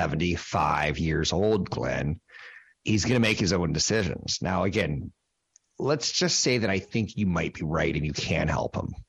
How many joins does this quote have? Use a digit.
1